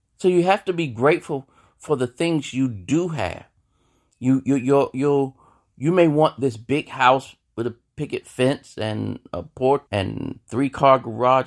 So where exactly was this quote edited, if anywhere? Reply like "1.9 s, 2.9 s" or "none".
9.9 s